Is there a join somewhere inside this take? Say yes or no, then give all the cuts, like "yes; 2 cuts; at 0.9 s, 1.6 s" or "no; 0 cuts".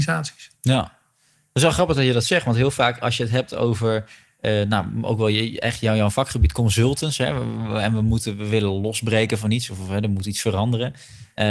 no; 0 cuts